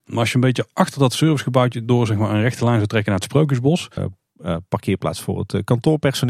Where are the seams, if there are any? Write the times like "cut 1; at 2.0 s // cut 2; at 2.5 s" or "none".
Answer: cut 1; at 4.0 s